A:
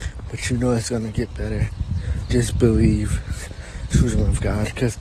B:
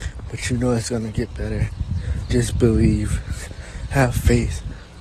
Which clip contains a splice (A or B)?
A